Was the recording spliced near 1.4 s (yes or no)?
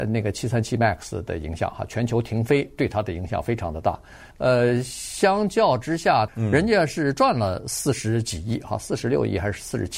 no